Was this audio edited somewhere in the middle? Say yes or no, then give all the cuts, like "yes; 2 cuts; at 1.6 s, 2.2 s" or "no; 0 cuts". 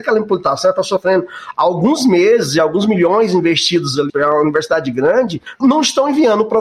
yes; 2 cuts; at 4.1 s, 5.6 s